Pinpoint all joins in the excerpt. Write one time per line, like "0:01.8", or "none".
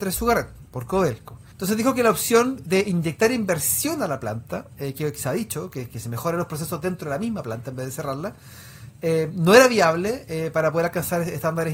0:01.5